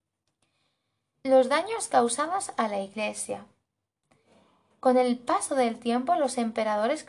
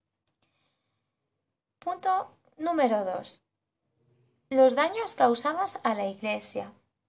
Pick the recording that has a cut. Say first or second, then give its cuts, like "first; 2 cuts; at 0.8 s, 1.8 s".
first; 1 cut; at 1.1 s